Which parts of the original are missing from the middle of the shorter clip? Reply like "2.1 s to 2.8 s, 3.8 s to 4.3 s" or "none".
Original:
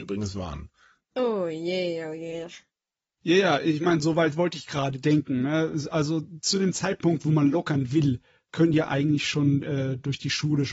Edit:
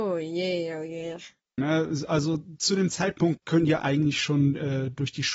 2.9 s to 5.4 s, 7.2 s to 8.4 s

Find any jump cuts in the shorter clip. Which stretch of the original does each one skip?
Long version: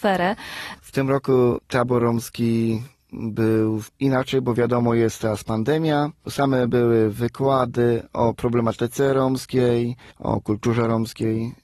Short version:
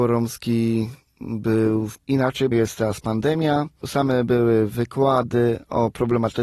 4.4 s to 4.9 s

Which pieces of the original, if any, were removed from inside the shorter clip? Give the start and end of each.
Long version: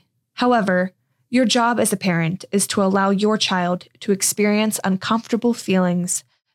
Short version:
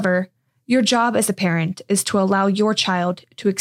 none

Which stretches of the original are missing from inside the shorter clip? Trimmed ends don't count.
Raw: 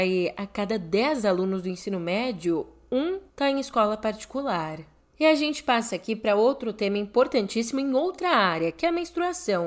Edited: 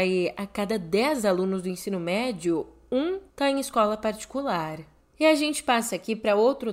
none

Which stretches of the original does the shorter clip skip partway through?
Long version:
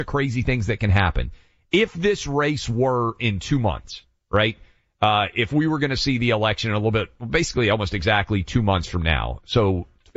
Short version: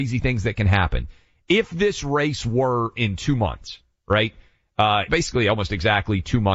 5.3 s to 7.3 s

